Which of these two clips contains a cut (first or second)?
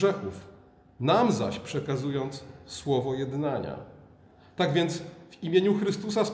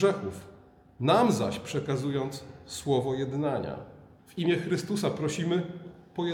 second